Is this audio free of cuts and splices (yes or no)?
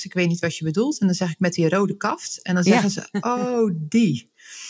yes